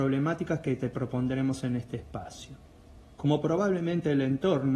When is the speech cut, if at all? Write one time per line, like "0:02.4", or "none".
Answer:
0:03.0